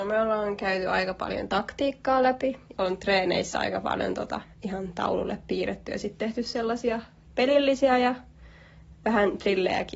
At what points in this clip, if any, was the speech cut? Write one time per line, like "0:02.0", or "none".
0:02.7
0:04.5